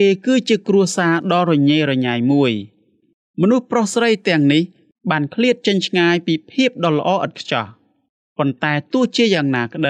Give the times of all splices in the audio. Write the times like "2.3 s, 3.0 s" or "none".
none